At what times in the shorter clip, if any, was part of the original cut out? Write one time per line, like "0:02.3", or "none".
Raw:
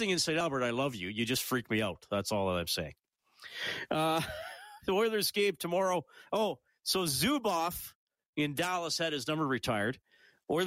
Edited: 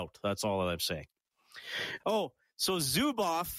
0:02.0